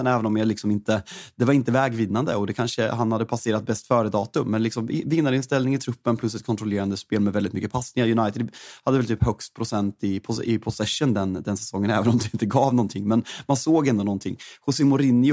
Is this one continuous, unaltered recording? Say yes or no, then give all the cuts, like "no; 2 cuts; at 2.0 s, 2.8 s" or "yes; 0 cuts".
yes; 0 cuts